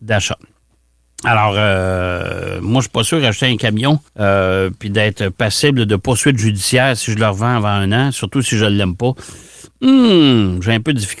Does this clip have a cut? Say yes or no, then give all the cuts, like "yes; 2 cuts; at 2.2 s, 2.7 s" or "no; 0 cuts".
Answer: yes; 1 cut; at 4.1 s